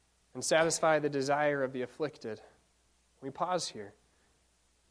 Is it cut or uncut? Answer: uncut